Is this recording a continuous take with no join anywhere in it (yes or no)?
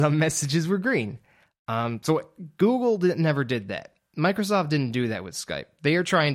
yes